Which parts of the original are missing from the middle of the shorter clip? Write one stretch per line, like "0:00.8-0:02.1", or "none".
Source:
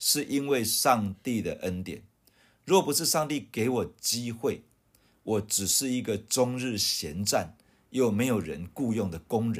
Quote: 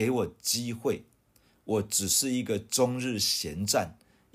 none

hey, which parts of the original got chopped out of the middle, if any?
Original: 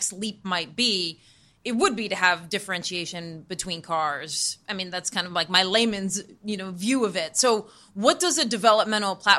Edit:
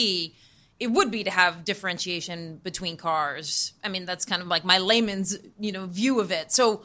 none

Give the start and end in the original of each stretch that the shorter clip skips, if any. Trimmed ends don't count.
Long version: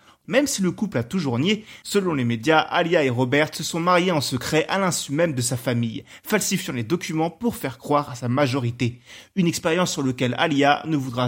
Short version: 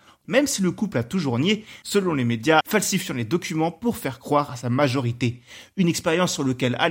0:02.6-0:06.2

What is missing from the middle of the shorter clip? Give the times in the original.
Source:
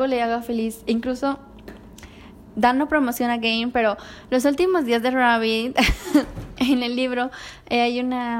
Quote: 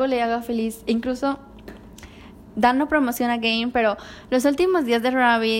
none

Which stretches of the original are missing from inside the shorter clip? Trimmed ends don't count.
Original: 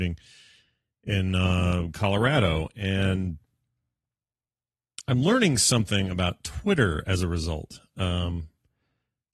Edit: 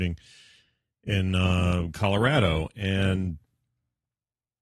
none

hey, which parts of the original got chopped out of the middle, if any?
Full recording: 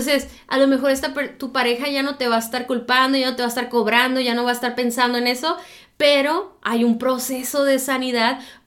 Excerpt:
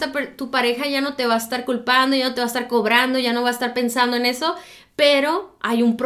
none

